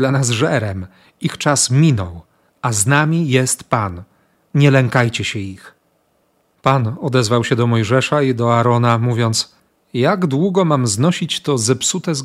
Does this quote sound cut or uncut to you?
uncut